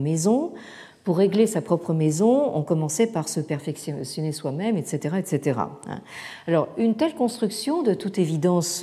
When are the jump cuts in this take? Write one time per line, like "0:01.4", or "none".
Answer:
none

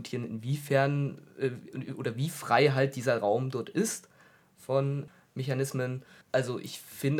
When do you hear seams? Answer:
0:06.2

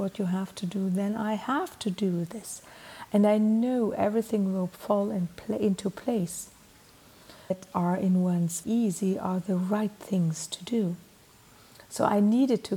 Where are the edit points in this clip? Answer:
0:07.5
0:08.6

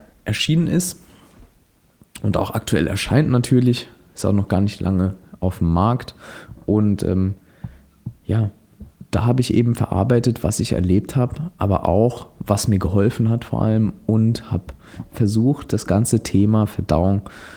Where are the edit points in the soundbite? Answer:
none

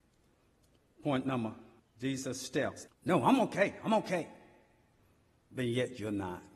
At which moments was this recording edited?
0:01.8
0:02.9

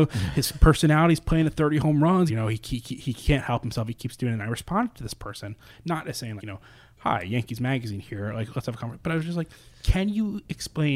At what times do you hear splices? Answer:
0:02.3
0:06.4

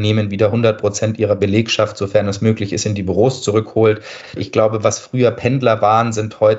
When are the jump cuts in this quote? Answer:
0:04.4

